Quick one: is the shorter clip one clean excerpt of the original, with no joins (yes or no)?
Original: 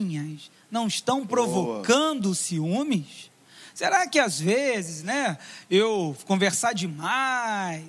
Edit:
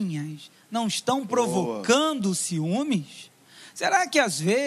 yes